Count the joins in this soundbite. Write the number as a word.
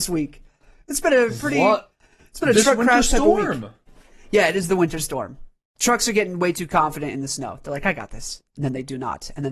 zero